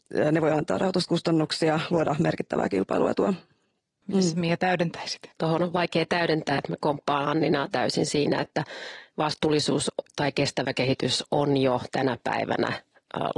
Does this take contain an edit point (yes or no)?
yes